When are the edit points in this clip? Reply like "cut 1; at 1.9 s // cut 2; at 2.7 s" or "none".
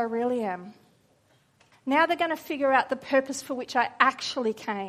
cut 1; at 1.7 s